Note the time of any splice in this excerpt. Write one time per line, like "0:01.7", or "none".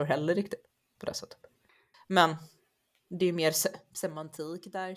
0:01.9

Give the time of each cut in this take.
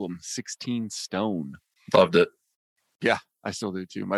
none

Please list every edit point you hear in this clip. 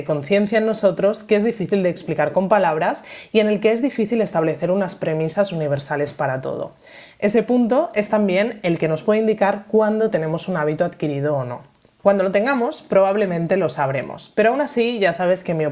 none

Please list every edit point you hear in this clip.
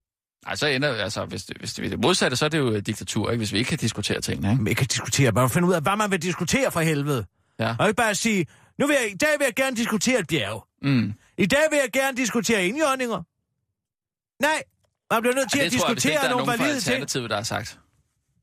none

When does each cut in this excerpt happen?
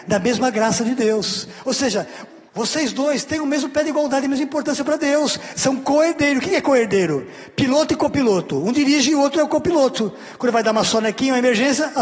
0:02.5

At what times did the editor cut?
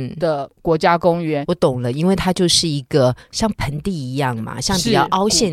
0:01.4

